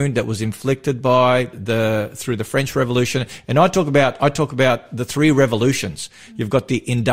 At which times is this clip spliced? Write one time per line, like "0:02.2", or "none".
0:01.5